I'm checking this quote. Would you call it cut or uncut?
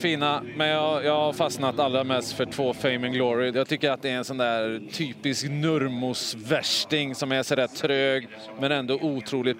cut